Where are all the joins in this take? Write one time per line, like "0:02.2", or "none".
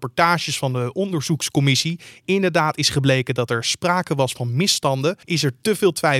0:05.2